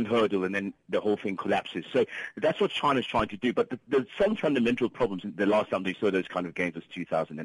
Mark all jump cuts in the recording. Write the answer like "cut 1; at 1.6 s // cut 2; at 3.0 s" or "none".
cut 1; at 5.2 s